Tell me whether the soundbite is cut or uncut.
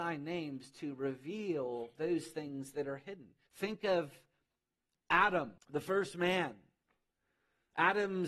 cut